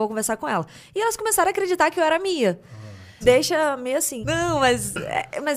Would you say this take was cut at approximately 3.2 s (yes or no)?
yes